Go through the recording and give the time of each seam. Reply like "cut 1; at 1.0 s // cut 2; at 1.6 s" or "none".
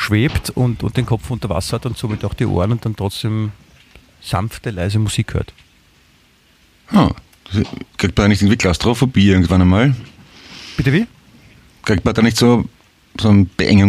none